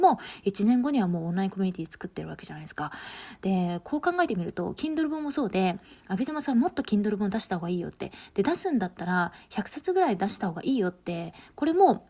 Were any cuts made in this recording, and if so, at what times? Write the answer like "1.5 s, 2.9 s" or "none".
none